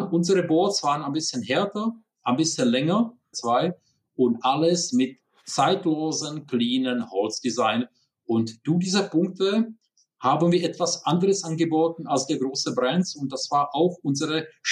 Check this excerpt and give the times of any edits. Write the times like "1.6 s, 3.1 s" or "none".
3.3 s